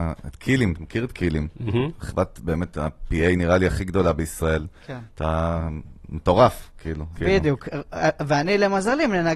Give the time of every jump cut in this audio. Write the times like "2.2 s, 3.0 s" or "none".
5.1 s, 7.2 s